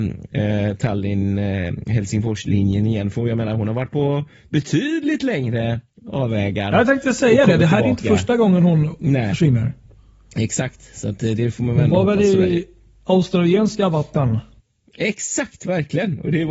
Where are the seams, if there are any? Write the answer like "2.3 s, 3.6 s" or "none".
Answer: none

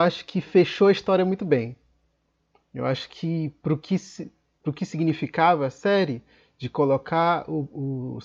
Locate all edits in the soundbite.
none

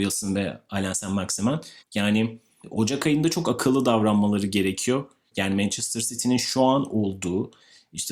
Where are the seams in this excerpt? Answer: 1.9 s, 5.3 s

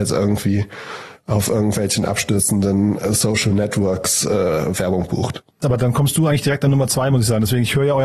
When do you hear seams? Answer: 5.6 s

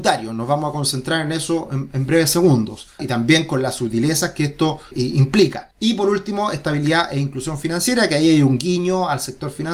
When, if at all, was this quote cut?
3.0 s

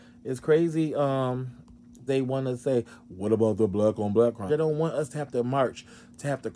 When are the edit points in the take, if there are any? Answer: 2.1 s, 4.5 s

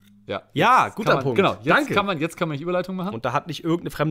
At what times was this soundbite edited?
3.1 s

